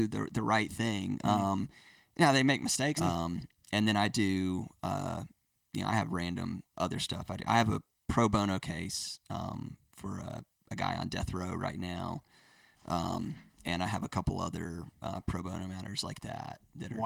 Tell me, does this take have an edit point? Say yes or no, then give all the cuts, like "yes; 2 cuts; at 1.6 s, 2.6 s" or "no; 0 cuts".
yes; 1 cut; at 3.0 s